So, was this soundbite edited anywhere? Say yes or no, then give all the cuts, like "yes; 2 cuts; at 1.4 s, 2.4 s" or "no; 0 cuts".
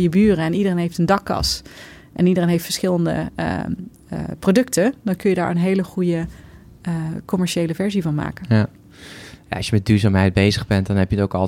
no; 0 cuts